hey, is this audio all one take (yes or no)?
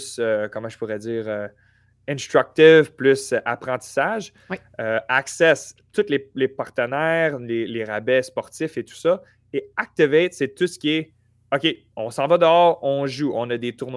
yes